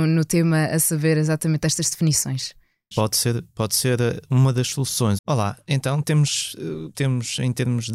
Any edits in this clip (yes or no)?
yes